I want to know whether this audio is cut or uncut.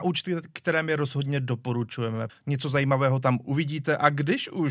cut